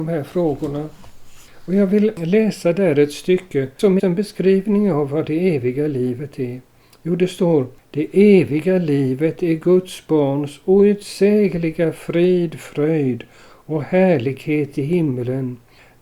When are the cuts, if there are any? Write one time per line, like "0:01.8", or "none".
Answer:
0:04.0